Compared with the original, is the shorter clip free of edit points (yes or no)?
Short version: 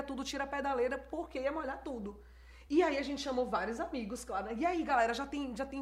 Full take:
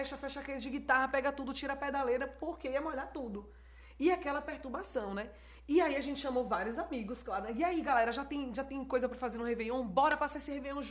no